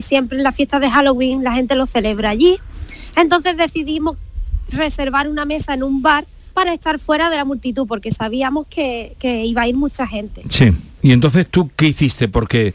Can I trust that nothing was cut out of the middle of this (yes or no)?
no